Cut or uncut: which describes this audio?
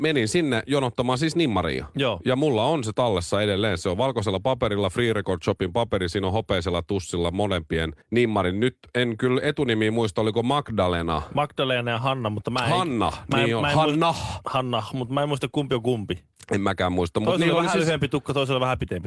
cut